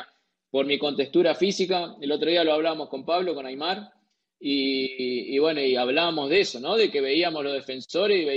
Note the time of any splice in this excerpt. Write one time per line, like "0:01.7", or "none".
none